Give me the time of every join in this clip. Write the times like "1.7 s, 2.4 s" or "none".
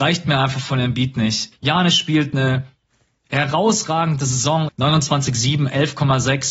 1.5 s, 4.7 s